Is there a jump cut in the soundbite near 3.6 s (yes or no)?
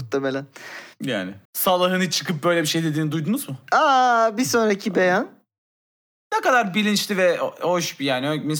no